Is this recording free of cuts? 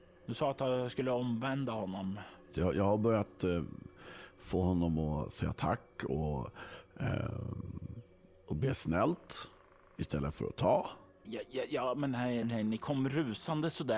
no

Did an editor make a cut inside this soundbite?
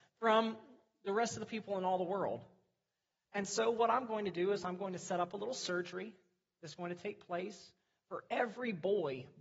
no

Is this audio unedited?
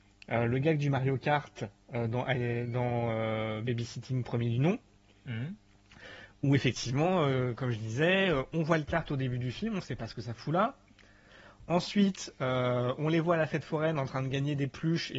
yes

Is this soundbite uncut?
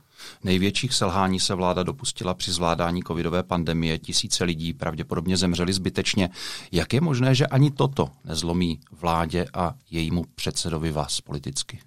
yes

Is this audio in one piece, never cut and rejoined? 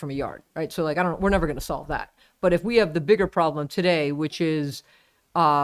yes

